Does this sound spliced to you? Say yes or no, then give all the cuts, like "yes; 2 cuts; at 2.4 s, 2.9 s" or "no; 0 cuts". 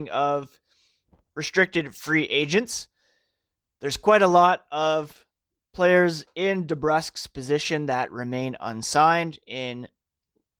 no; 0 cuts